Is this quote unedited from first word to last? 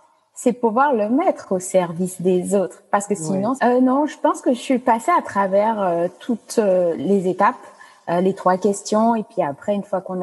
no; 1 cut; at 3.6 s

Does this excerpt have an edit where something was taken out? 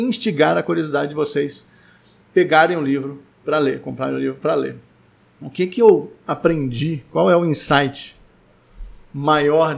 no; 0 cuts

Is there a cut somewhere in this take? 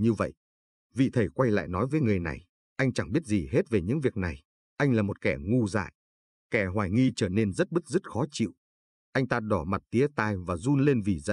no; 0 cuts

